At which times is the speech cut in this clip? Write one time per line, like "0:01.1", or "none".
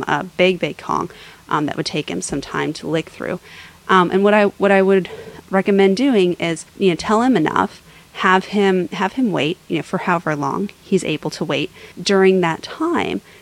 0:06.7
0:11.9